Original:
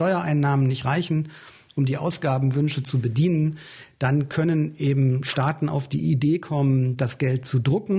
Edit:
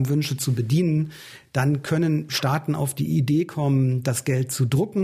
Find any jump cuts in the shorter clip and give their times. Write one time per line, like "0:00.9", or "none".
0:02.3